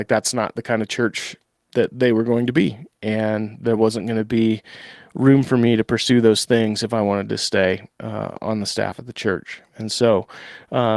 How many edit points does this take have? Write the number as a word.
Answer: zero